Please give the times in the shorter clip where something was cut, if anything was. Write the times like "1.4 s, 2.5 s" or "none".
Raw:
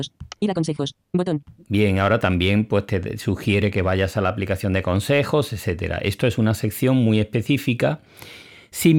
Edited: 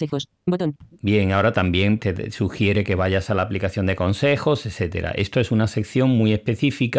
2.0 s